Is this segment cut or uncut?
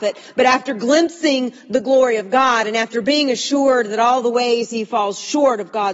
uncut